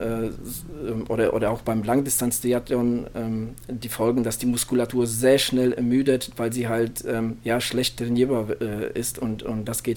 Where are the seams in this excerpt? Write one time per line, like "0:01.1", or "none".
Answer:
none